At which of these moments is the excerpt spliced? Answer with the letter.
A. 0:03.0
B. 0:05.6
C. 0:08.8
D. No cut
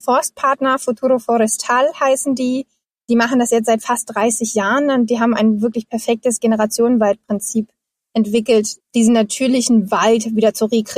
C